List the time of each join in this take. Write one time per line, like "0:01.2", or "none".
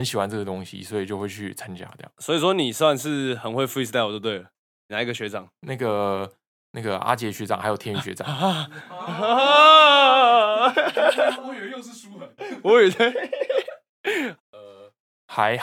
0:04.9
0:14.4